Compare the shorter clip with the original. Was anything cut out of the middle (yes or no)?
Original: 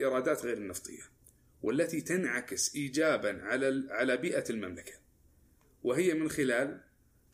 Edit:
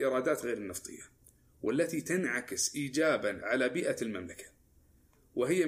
yes